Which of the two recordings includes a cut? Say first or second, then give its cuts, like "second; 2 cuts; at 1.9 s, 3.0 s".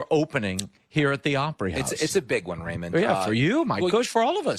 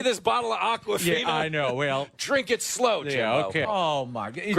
second; 1 cut; at 3.7 s